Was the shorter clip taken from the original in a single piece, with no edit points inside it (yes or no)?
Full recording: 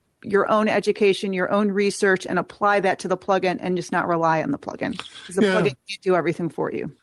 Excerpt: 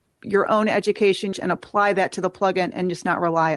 no